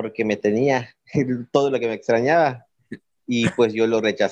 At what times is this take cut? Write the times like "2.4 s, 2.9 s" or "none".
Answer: none